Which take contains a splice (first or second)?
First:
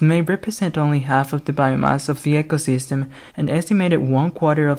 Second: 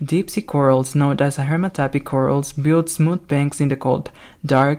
first